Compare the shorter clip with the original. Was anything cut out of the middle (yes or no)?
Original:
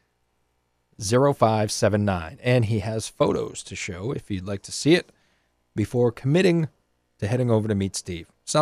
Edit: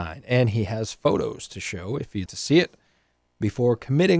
yes